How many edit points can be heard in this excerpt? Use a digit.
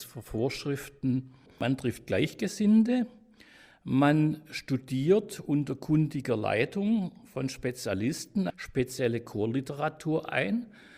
2